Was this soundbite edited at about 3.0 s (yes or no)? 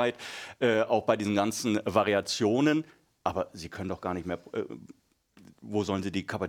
no